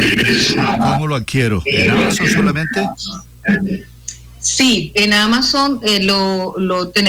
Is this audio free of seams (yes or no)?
yes